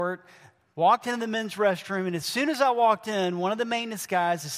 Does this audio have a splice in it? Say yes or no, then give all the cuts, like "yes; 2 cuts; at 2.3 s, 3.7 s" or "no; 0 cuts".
no; 0 cuts